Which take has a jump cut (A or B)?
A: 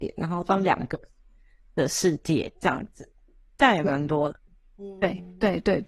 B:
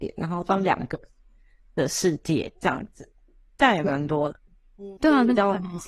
B